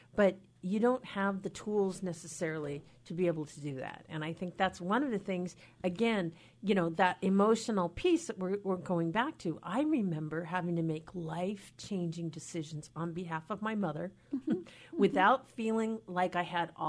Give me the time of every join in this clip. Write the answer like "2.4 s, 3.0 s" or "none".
none